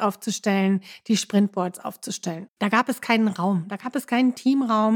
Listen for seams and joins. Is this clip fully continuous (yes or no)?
no